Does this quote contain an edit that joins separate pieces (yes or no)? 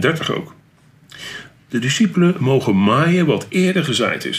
no